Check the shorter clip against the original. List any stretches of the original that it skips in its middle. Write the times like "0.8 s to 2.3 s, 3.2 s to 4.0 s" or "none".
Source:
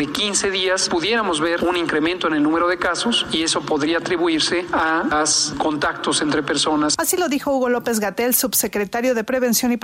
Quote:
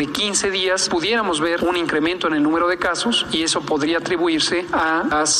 none